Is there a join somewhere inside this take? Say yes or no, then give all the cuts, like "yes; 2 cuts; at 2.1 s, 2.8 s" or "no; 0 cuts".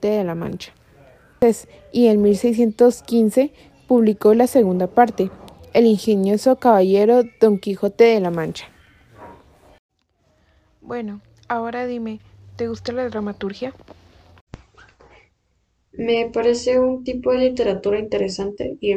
no; 0 cuts